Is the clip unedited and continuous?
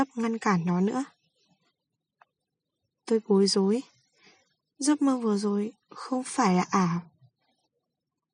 yes; 0 cuts

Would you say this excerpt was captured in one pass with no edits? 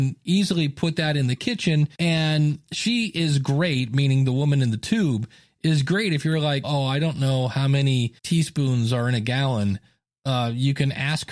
no; 3 cuts; at 1.9 s, 6.6 s, 8.2 s

